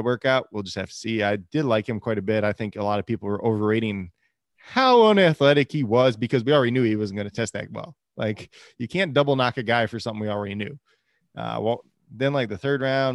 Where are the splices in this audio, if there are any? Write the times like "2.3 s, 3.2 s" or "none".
none